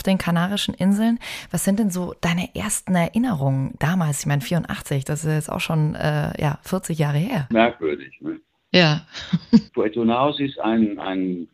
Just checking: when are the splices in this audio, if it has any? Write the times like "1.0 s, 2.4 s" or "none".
7.5 s, 9.7 s